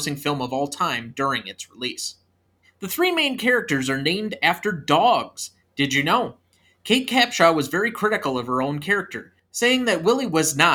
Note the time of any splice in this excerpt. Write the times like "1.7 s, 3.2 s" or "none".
2.6 s, 5.6 s